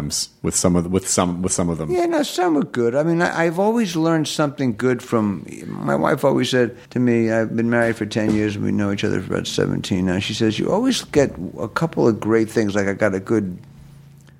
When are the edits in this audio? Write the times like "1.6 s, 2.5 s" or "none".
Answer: 6.9 s